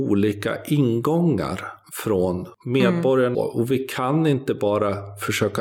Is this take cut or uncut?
cut